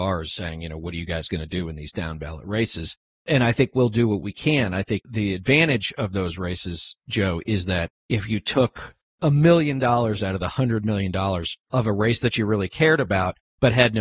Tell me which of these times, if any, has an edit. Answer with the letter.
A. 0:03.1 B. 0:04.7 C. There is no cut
C